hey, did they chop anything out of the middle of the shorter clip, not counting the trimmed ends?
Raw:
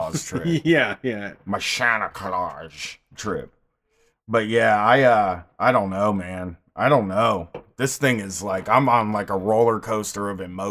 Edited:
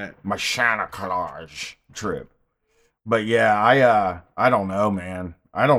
no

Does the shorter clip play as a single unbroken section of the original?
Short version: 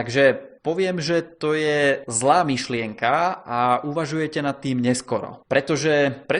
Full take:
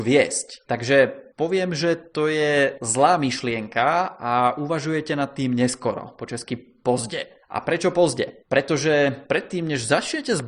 no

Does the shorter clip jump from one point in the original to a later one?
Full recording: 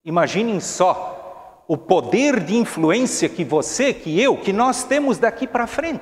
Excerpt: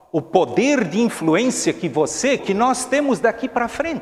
yes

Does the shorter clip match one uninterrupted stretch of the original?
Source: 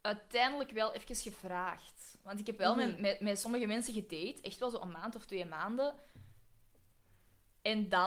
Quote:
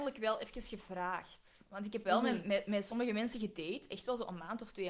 yes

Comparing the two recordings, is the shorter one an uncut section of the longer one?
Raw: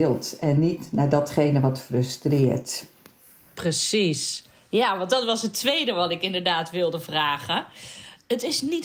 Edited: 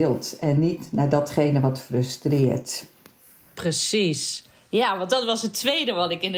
yes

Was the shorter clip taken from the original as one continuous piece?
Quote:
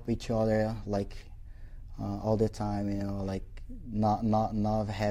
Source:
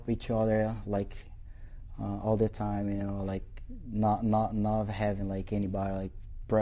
yes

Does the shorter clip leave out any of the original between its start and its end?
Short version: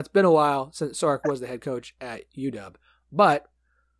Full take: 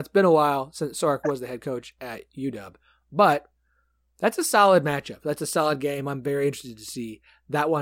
no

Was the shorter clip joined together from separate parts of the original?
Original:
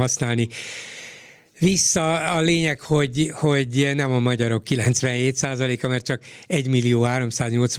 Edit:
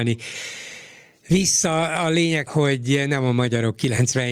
yes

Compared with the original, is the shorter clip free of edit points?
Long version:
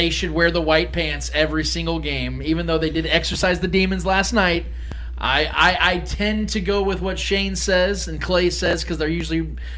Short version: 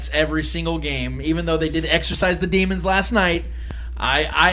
yes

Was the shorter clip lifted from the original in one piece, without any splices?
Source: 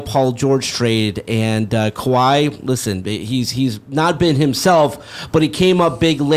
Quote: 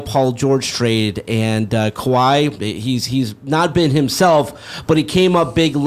no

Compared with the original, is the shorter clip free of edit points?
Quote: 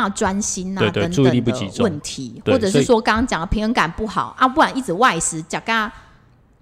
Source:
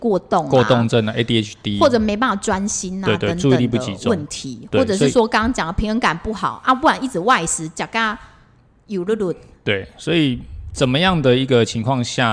yes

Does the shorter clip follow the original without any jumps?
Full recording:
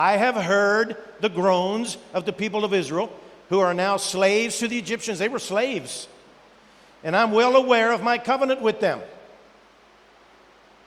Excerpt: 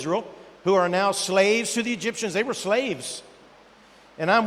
yes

